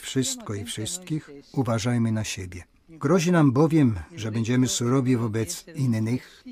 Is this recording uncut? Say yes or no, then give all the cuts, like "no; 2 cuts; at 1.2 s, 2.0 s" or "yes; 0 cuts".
yes; 0 cuts